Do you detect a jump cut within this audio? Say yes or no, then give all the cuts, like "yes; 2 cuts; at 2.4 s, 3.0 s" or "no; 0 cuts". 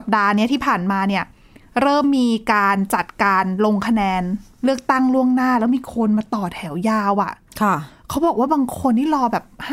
no; 0 cuts